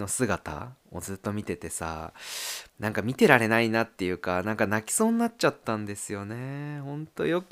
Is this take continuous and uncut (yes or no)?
no